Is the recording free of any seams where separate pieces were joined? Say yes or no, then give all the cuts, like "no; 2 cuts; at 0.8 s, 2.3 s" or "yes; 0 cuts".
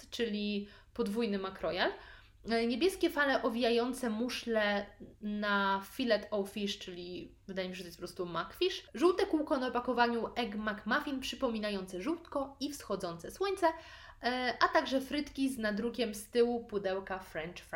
no; 1 cut; at 5.1 s